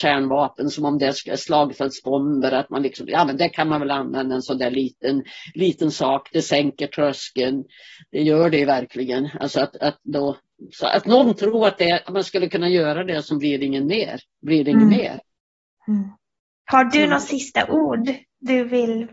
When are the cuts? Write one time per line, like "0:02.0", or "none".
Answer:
none